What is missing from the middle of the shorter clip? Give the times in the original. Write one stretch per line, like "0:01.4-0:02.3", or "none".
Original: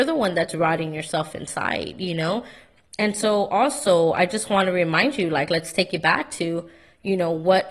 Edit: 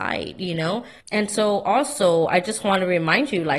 0:02.6-0:02.9